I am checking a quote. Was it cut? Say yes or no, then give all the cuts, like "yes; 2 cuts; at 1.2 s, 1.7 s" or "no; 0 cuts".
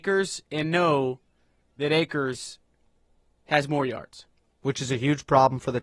no; 0 cuts